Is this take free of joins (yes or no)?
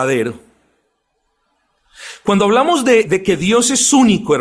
no